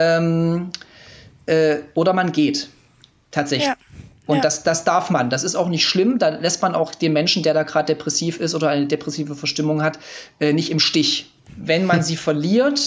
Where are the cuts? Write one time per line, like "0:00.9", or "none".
0:11.5